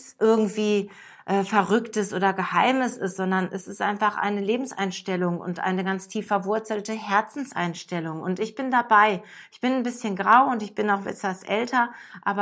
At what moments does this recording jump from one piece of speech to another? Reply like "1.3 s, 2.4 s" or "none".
none